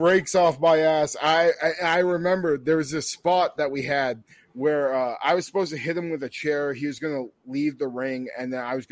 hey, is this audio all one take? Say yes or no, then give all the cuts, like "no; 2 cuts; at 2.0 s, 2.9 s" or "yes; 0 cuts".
yes; 0 cuts